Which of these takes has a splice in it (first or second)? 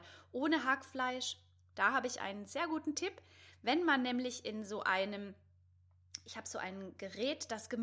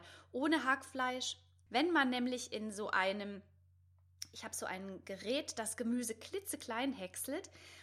second